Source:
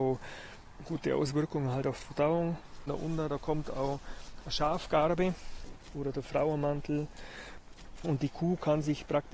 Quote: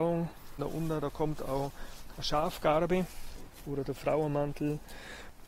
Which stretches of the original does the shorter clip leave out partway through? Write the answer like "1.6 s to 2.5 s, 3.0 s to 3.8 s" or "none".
none

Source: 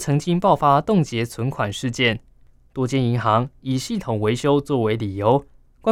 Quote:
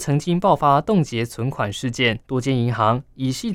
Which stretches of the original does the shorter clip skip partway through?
2.2 s to 2.7 s

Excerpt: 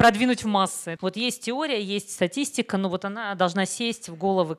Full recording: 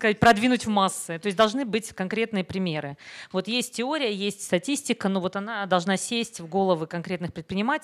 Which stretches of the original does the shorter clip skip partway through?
1.2 s to 3.3 s

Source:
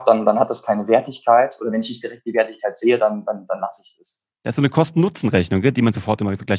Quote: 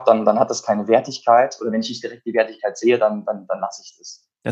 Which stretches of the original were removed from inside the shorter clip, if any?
none

